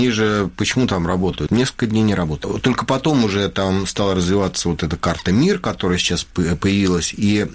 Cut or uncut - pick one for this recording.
cut